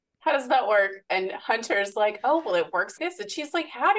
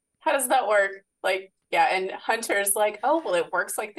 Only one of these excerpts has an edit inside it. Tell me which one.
first; 2 cuts; at 1.1 s, 3.0 s

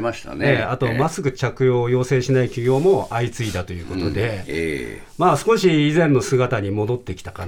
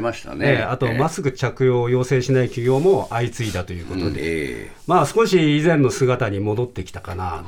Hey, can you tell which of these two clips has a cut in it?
second; 1 cut; at 4.1 s

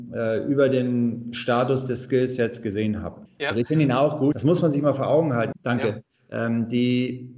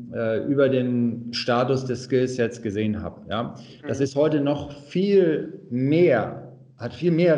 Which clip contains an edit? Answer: first; 3 cuts; at 3.3 s, 4.3 s, 5.5 s

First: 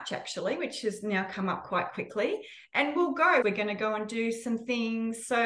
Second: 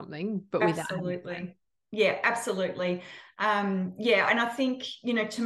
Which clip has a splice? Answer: first; 1 cut; at 3.4 s

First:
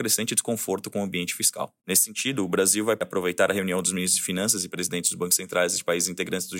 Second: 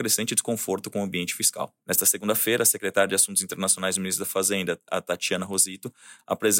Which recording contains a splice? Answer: second; 1 cut; at 1.8 s

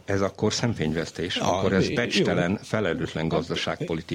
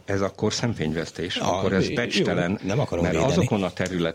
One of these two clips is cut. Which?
second; 1 cut; at 2.6 s

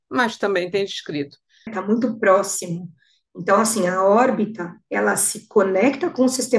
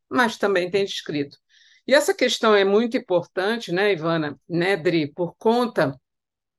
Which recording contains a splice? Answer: first; 1 cut; at 1.7 s

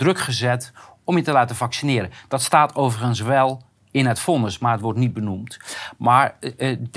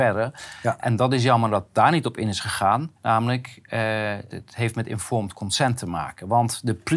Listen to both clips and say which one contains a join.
second; 2 cuts; at 3.0 s, 4.3 s

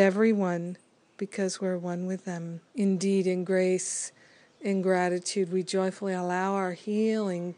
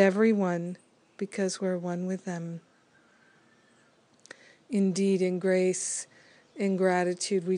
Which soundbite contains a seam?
first; 1 cut; at 2.7 s

